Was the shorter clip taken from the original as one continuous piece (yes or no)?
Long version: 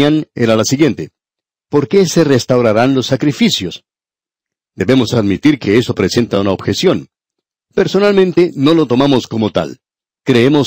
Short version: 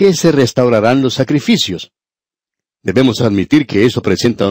yes